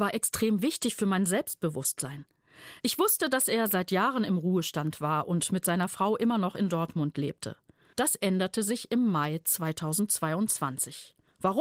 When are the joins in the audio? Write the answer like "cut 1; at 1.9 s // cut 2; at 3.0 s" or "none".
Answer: cut 1; at 2.8 s // cut 2; at 7.9 s